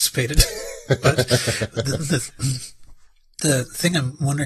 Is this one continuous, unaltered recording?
no; 1 cut; at 3.4 s

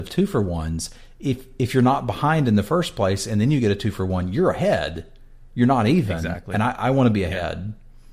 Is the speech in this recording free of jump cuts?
yes; 0 cuts

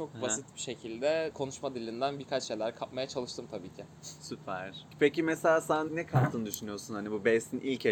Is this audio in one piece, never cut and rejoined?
no; 1 cut; at 5.9 s

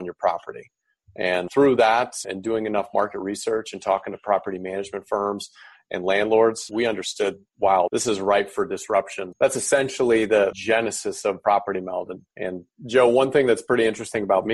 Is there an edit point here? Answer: yes; 2 cuts; at 9.3 s, 12.3 s

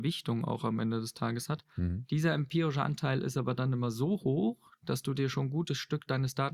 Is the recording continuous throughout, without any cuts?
yes; 0 cuts

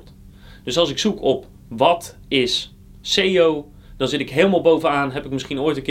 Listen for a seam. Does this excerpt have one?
no; 0 cuts

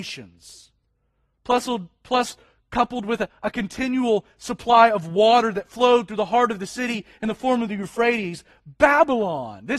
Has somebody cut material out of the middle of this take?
no; 0 cuts

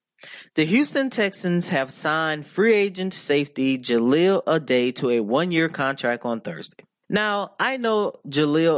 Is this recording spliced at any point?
no; 0 cuts

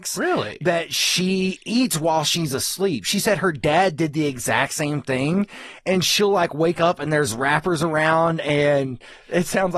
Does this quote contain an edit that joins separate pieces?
no; 0 cuts

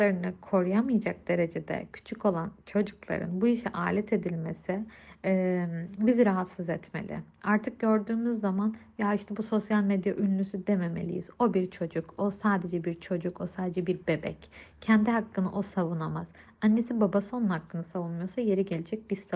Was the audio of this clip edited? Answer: no; 0 cuts

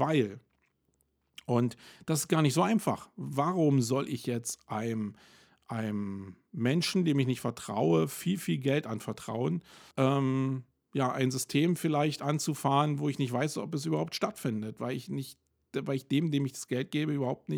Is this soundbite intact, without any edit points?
no; 1 cut; at 9.9 s

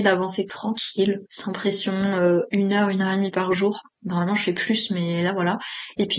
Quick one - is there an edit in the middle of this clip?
yes; 1 cut; at 1.3 s

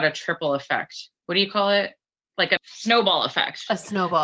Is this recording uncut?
no; 2 cuts; at 1.2 s, 2.6 s

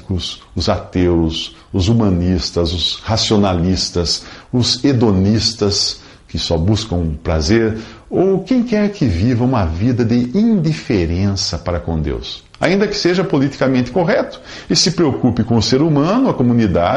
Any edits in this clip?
no; 0 cuts

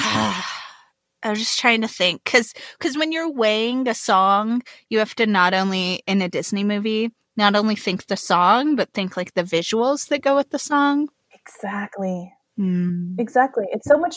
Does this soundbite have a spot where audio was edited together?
no; 0 cuts

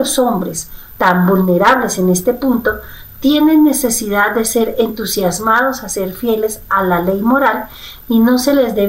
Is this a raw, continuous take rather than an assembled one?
no; 1 cut; at 1.0 s

